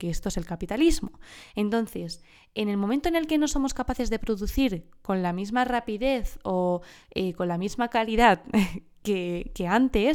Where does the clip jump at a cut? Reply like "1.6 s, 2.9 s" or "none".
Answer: none

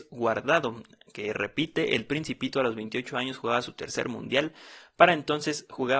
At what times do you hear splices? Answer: none

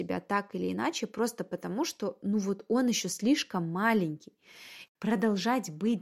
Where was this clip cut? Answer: 4.9 s

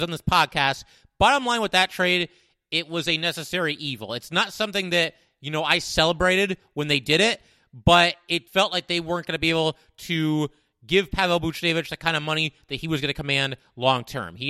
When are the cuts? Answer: 8.5 s

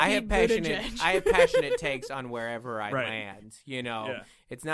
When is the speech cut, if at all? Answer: none

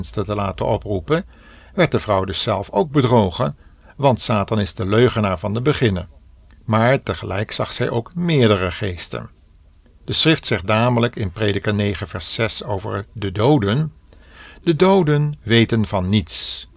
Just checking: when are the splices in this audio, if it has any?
6.6 s

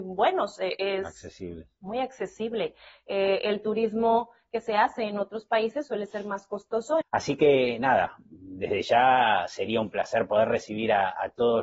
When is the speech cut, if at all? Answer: 7.0 s

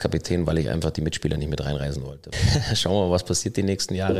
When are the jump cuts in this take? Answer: 2.3 s

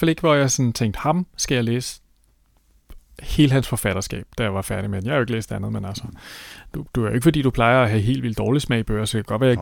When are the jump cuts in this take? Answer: none

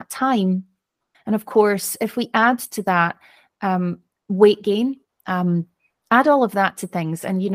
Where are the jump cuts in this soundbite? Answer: 1.1 s, 5.1 s

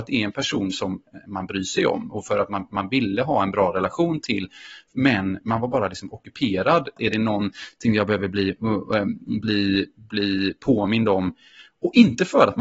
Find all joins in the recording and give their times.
7.0 s

